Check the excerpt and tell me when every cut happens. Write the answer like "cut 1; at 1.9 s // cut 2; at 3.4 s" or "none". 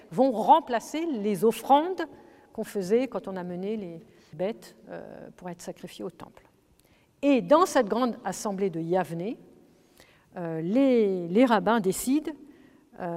cut 1; at 4.3 s